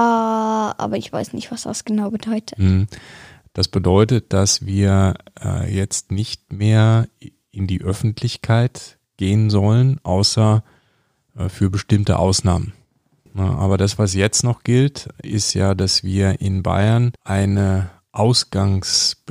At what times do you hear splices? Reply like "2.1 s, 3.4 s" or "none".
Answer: 13.3 s, 17.2 s